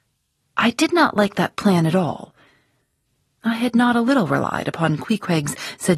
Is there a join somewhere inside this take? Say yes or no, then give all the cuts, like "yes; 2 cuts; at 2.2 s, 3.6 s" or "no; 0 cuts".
no; 0 cuts